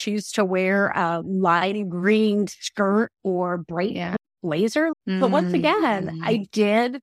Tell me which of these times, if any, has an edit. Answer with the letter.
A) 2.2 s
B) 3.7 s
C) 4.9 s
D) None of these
C